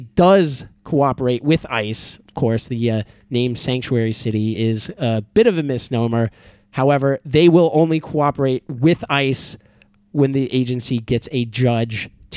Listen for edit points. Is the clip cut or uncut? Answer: uncut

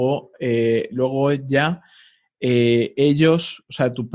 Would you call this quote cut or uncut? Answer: uncut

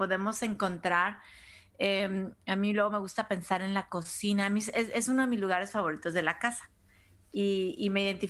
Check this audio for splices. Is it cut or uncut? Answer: uncut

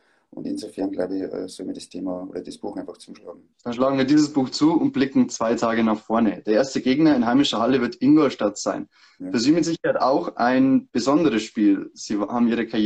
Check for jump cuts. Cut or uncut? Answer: cut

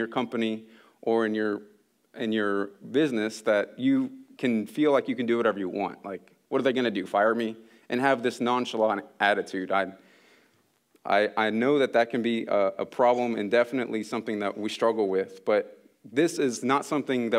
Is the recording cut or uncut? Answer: uncut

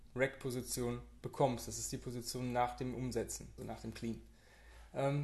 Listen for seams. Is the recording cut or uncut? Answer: cut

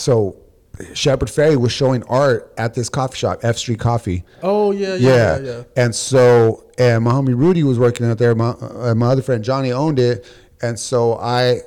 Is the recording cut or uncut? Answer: uncut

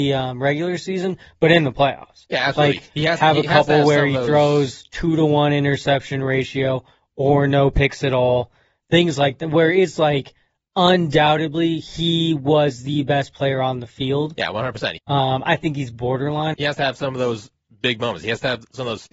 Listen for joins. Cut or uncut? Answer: cut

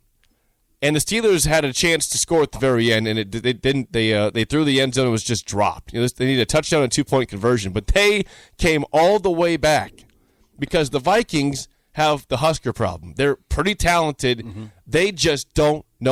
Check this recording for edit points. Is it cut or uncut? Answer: uncut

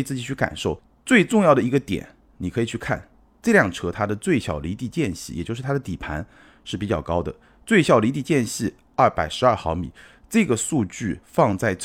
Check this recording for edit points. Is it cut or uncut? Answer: uncut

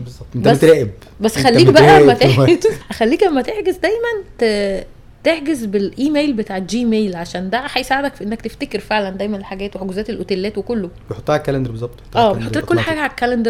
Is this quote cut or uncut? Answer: cut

